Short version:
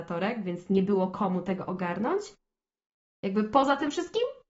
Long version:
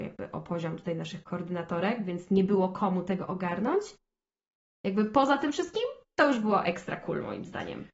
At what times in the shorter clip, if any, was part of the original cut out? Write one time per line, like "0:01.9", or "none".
none

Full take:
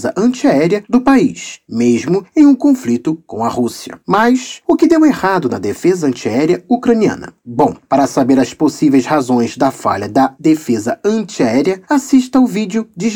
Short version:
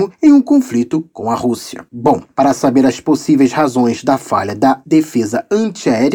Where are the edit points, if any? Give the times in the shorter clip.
0:01.9

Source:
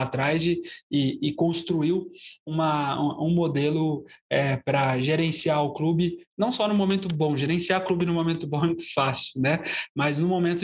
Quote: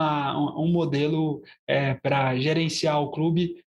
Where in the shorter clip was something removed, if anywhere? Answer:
none

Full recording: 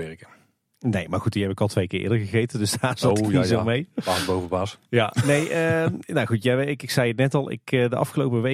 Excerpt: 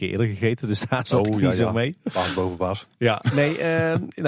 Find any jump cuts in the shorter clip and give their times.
none

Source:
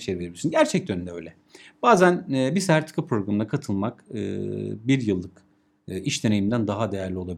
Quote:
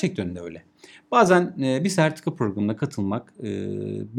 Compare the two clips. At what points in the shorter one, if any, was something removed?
none

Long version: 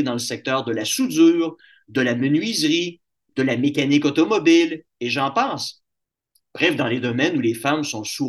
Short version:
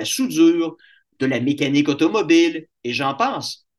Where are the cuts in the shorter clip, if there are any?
0:01.0

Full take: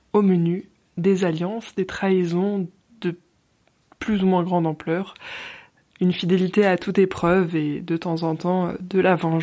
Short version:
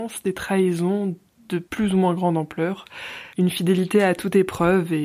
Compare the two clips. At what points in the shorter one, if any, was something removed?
0:01.7
0:03.3

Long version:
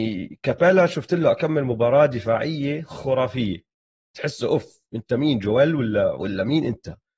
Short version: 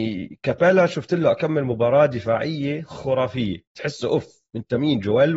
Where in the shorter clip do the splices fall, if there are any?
0:03.7

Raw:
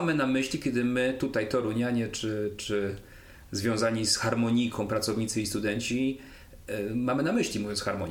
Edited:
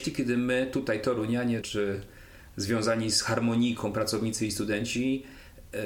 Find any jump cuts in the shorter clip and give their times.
0:01.6

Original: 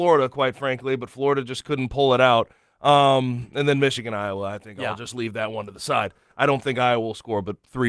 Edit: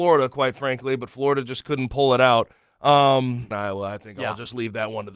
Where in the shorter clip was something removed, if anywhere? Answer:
0:03.5

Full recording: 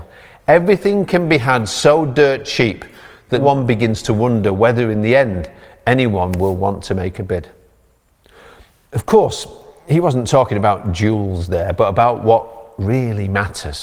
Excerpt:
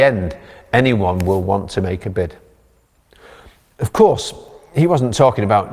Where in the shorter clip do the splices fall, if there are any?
none

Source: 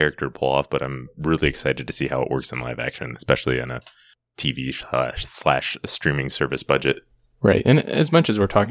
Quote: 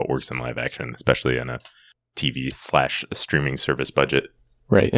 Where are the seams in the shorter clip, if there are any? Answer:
0:02.5

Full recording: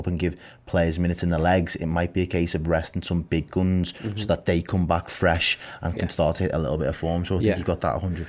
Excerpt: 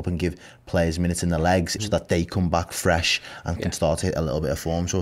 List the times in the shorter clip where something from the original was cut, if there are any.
0:01.8

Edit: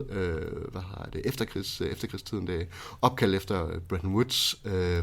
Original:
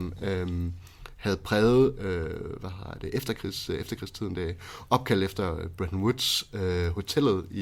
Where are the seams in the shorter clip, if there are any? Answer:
none

